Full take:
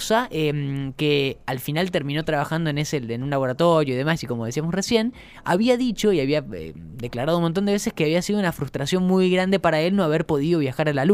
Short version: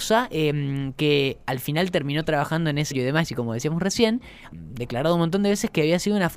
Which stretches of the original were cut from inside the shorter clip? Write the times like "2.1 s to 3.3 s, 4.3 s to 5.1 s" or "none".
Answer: 2.9 s to 3.8 s, 5.4 s to 6.7 s